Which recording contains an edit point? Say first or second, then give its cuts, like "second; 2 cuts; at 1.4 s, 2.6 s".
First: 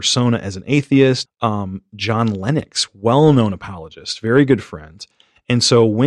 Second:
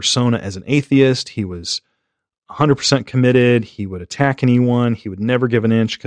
first; 1 cut; at 1.3 s